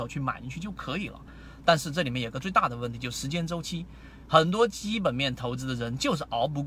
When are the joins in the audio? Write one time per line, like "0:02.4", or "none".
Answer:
none